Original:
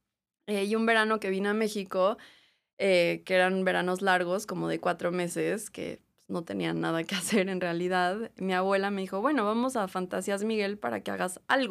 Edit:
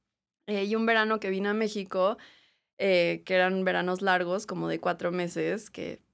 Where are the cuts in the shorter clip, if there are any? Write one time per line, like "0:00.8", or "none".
none